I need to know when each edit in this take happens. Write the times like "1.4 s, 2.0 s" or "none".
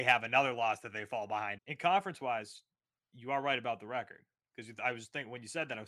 1.6 s